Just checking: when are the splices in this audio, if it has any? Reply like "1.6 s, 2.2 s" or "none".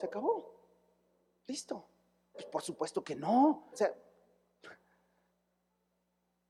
2.3 s, 3.7 s